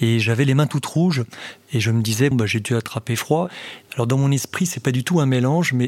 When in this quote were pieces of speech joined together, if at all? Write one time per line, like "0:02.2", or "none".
0:02.3
0:03.9